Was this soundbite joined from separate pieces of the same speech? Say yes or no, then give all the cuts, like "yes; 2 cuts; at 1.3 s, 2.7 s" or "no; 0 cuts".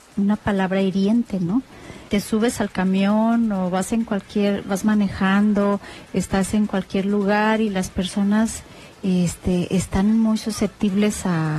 yes; 1 cut; at 2.1 s